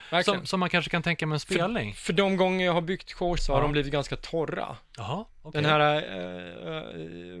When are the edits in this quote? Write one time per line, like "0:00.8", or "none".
0:03.4